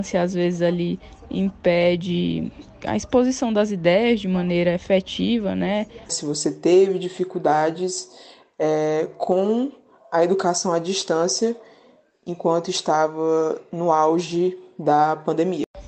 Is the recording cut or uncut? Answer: cut